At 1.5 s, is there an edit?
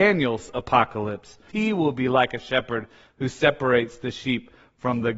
yes; 1 cut; at 1.5 s

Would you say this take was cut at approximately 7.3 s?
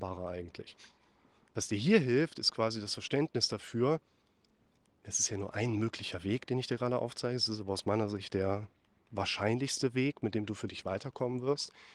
no; 1 cut; at 1.5 s

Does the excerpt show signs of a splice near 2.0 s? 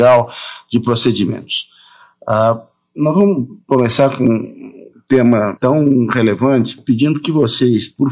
no; 1 cut; at 5.6 s

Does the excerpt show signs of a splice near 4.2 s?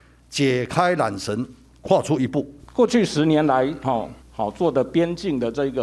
yes; 2 cuts; at 2.6 s, 4.2 s

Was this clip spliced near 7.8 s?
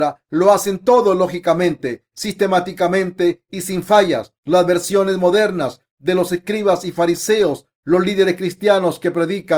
no; 1 cut; at 4.4 s

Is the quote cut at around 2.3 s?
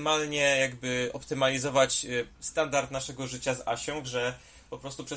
yes; 2 cuts; at 2.3 s, 4.0 s

